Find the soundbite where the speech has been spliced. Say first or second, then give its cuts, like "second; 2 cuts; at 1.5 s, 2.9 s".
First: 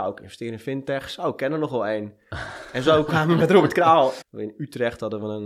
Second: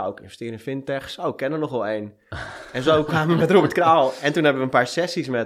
first; 1 cut; at 4.2 s